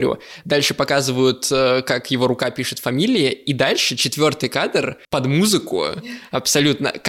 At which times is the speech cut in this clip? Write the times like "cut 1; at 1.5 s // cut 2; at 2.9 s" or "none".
cut 1; at 5.0 s